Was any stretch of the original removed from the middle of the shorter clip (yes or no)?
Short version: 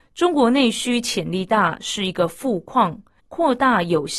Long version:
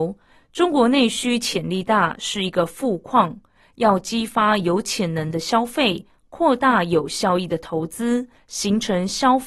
yes